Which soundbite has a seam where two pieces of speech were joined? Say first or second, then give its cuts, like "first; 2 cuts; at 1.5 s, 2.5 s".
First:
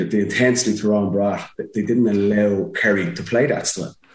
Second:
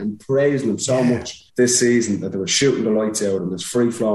second; 1 cut; at 1.5 s